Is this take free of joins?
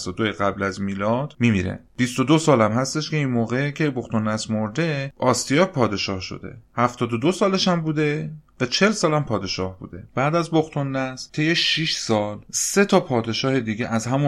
no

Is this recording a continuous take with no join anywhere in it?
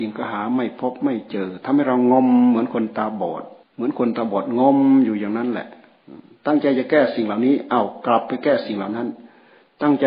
no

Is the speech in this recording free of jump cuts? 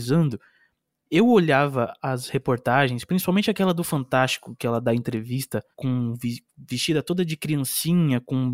no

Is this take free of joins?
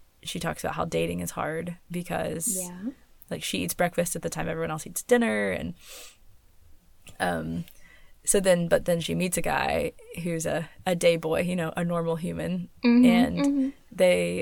yes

